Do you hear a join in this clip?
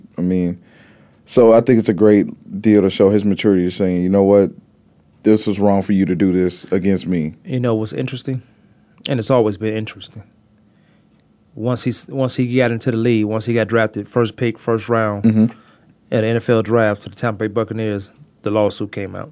no; 0 cuts

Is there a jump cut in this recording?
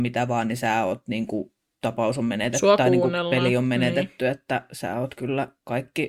no; 0 cuts

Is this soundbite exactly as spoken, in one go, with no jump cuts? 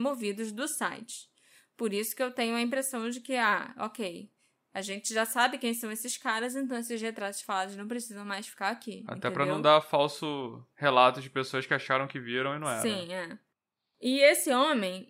yes; 0 cuts

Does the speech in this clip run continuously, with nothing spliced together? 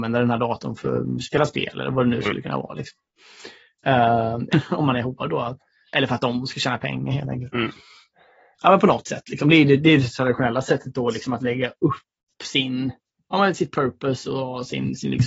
no; 1 cut; at 4.5 s

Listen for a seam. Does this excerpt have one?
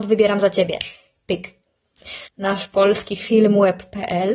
yes; 1 cut; at 2.3 s

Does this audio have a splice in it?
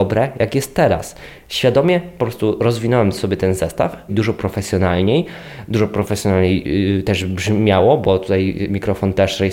yes; 1 cut; at 4.1 s

